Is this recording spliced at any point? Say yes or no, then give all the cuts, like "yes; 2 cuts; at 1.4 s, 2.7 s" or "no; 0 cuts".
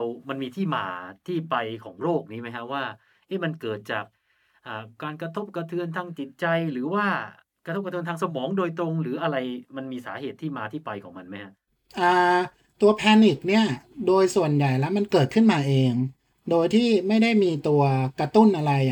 no; 0 cuts